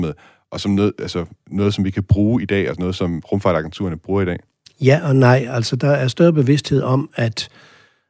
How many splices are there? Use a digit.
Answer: 0